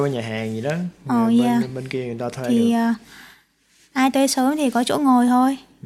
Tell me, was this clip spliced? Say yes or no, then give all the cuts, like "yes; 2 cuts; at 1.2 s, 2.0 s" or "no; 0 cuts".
no; 0 cuts